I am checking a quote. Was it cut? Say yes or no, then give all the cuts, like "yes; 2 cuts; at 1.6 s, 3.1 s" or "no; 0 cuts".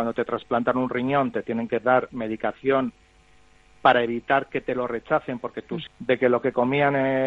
yes; 1 cut; at 5.9 s